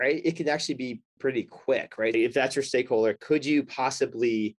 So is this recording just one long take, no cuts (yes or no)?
no